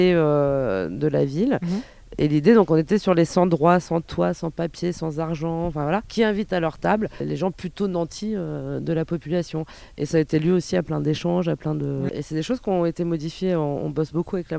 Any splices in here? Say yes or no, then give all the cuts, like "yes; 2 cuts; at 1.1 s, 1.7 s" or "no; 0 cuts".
yes; 1 cut; at 12.1 s